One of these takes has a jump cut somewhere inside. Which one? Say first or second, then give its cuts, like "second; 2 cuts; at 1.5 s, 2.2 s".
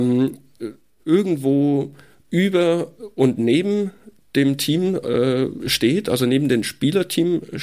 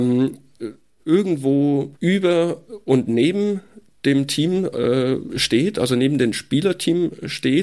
second; 1 cut; at 1.9 s